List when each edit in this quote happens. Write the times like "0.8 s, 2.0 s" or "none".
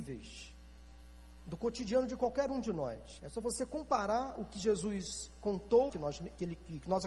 3.2 s, 5.9 s